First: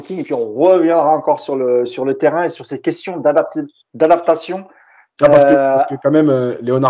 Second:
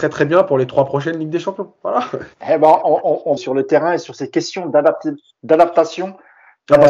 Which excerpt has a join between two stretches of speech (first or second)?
second